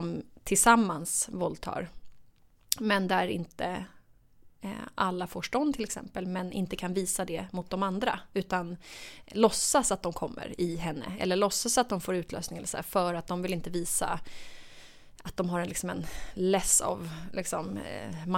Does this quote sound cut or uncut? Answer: uncut